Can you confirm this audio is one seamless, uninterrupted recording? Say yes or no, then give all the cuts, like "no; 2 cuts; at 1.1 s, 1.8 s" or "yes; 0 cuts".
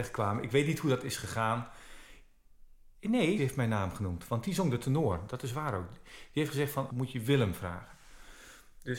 no; 2 cuts; at 3.4 s, 6.9 s